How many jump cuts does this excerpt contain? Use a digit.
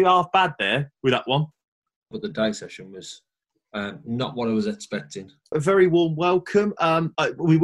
2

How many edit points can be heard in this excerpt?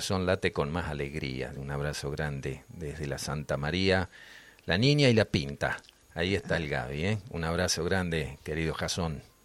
1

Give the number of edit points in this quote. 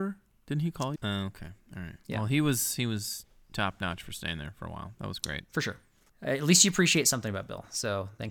2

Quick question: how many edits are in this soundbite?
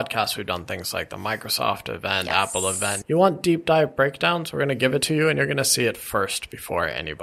1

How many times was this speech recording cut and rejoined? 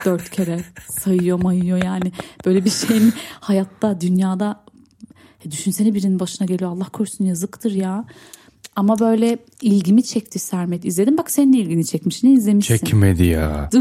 0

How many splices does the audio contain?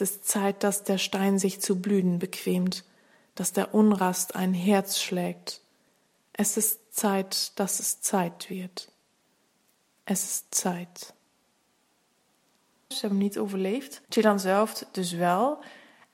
2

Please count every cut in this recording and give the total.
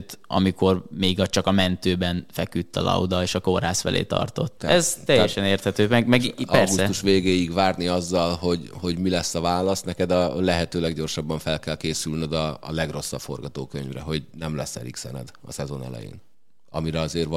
1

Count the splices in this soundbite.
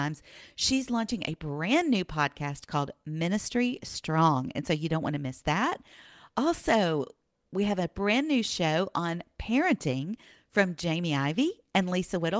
0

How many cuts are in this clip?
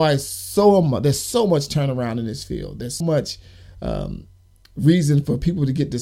1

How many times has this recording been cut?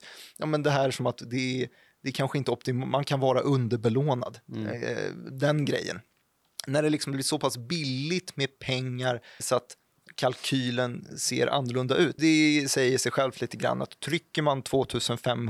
2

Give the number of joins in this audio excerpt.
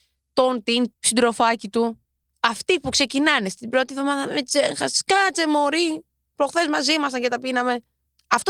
1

